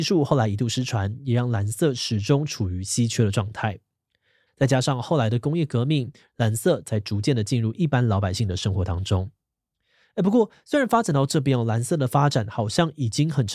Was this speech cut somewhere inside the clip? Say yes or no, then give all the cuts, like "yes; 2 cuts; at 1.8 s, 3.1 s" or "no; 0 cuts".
yes; 2 cuts; at 4.5 s, 6.3 s